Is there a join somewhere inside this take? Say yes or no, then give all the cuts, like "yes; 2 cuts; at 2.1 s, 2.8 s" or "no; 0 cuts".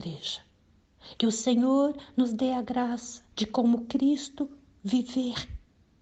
yes; 2 cuts; at 1.1 s, 3.3 s